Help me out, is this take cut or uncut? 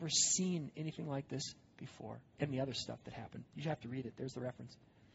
uncut